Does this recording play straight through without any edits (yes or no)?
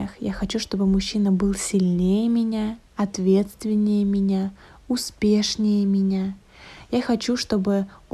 yes